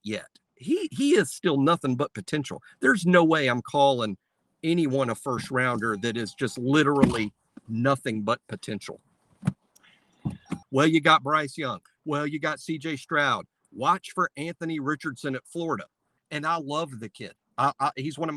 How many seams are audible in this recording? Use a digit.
2